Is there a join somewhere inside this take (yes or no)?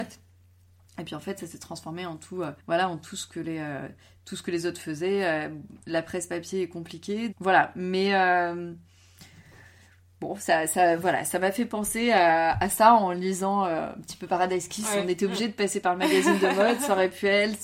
yes